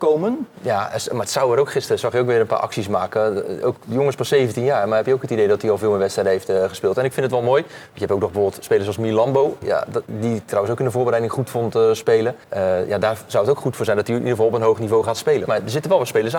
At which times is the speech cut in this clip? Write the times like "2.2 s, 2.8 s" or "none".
12.4 s, 15.5 s